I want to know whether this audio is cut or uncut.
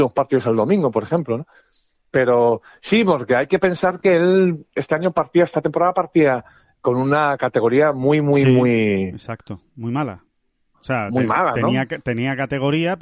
uncut